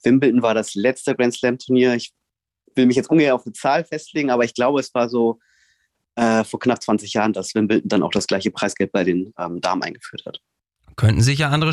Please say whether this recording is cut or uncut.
uncut